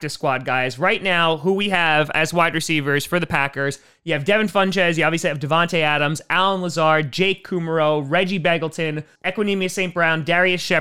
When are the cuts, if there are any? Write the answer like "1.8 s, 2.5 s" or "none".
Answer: 9.2 s